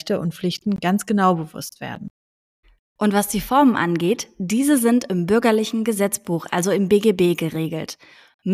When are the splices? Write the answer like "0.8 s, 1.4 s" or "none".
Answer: none